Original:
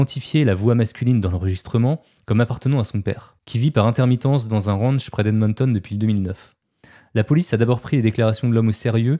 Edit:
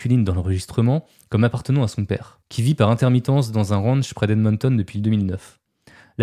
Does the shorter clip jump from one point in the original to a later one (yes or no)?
no